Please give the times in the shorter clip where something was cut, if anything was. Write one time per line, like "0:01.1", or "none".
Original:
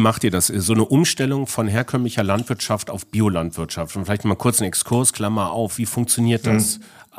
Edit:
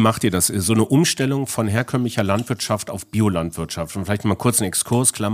none